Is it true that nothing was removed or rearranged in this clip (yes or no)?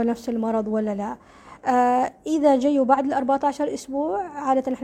yes